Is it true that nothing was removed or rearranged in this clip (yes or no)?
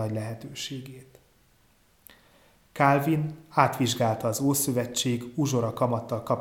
yes